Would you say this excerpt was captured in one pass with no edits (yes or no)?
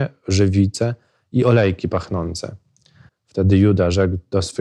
no